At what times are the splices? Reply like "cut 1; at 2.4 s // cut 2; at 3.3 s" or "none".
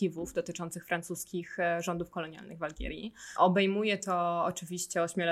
none

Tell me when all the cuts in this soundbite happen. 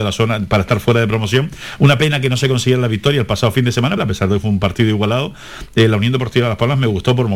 cut 1; at 4.0 s

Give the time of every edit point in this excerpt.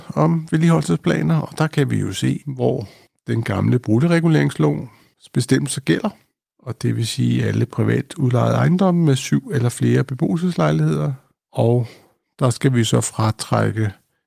cut 1; at 2.4 s

